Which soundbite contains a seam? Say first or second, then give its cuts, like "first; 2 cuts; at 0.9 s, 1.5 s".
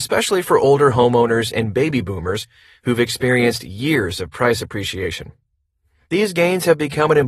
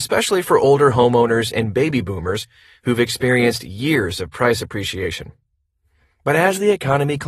first; 1 cut; at 6.0 s